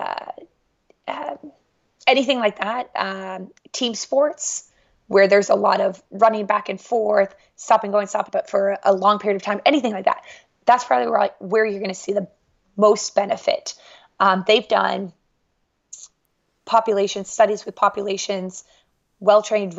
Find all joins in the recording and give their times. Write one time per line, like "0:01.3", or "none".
0:08.3